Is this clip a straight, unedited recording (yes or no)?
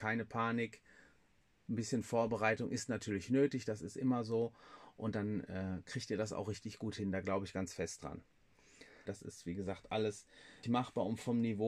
no